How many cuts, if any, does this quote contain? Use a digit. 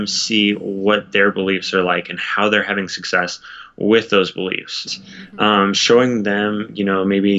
1